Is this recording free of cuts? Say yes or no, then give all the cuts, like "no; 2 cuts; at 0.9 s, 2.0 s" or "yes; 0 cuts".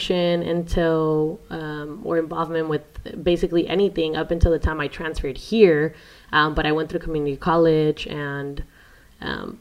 yes; 0 cuts